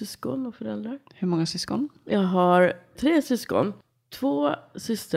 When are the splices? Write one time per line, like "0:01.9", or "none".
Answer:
none

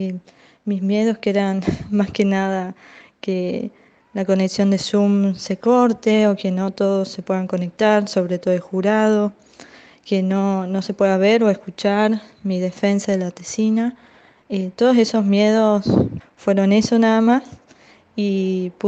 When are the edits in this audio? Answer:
0:16.2

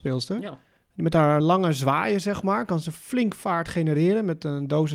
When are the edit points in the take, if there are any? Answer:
0:01.4

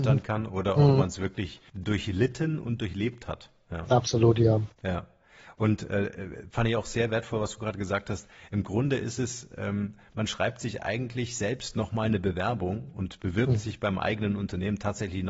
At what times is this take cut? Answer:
0:01.7

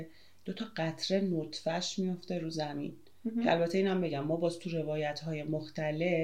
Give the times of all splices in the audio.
none

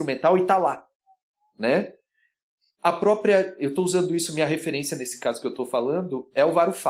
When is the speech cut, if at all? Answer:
none

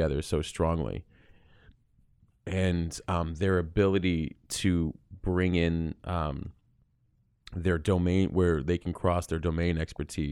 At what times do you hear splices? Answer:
none

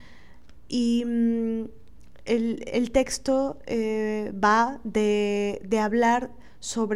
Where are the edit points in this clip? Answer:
none

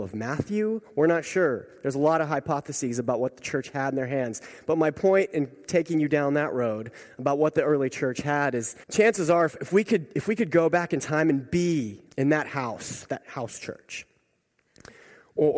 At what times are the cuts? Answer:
0:08.8
0:12.1

